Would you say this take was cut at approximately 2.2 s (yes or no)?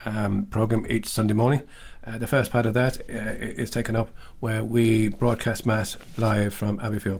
no